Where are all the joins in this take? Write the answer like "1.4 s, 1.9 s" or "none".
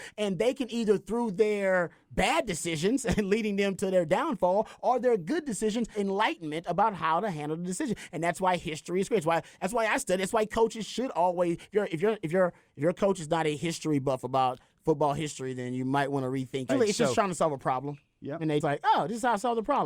5.9 s, 16.7 s, 18.6 s

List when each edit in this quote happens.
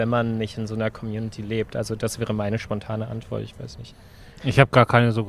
none

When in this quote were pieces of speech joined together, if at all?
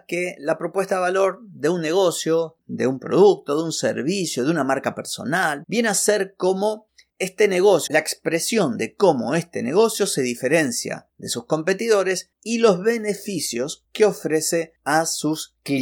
5.6 s, 7.9 s

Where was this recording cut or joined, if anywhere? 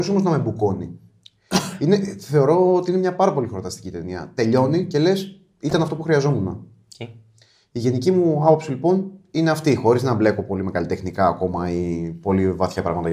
none

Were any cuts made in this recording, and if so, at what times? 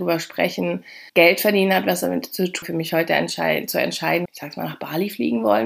1.1 s, 2.6 s, 4.3 s

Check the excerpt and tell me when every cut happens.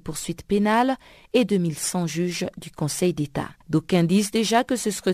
3.6 s

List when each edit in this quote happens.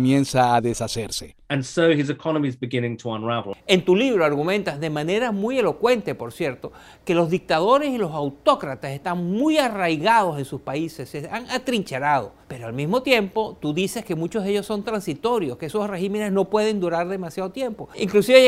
12.4 s

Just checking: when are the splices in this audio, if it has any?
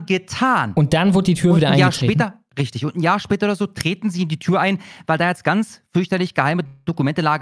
none

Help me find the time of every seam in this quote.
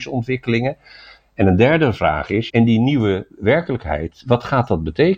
1.2 s, 2.5 s

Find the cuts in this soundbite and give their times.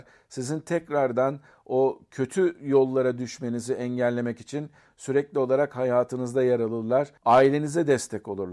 none

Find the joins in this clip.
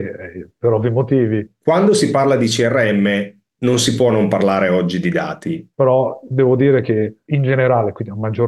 1.5 s, 5.7 s

